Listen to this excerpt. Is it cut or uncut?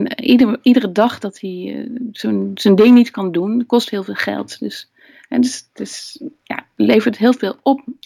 uncut